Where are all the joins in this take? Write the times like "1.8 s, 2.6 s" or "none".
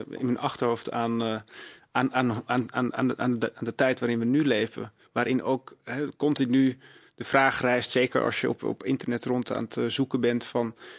none